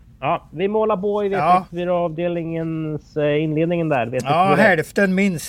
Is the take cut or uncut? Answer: uncut